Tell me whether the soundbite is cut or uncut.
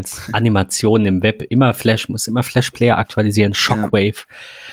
uncut